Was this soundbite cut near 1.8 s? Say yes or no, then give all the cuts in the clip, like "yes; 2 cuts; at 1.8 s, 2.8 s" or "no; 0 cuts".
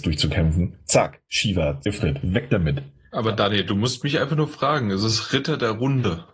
yes; 1 cut; at 1.8 s